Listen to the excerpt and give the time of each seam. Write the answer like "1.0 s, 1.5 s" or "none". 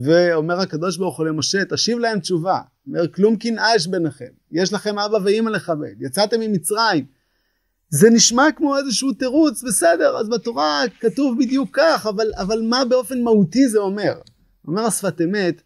none